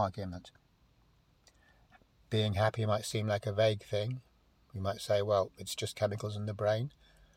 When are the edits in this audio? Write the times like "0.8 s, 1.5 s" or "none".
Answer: none